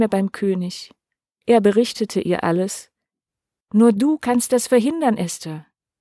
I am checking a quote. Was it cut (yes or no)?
yes